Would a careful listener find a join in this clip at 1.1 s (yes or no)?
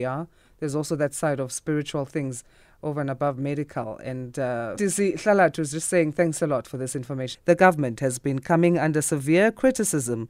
no